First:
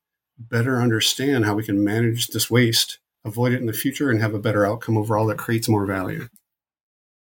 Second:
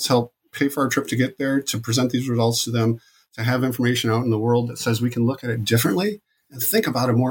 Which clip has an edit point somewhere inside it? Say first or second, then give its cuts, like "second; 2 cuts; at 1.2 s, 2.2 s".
first; 1 cut; at 3.1 s